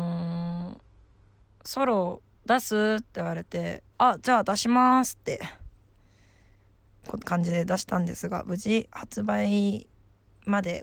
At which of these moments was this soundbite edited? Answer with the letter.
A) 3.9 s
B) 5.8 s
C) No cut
A